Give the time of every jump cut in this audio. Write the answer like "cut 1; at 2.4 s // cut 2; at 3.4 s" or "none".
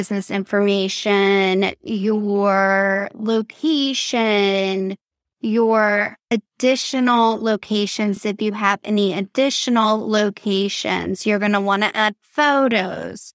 none